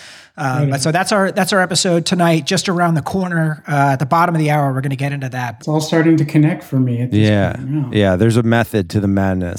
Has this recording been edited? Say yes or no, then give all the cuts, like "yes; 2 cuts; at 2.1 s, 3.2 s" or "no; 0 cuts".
yes; 1 cut; at 5.6 s